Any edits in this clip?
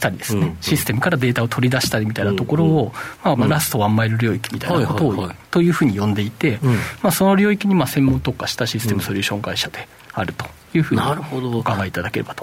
yes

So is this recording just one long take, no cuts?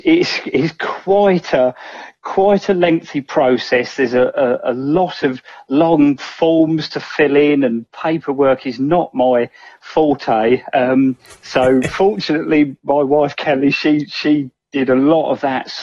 yes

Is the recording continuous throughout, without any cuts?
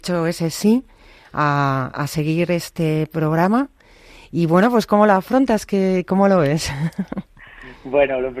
yes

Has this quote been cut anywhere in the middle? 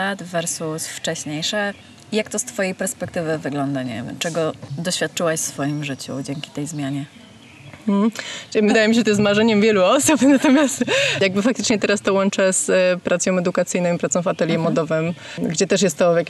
yes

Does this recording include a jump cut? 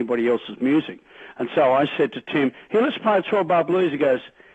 no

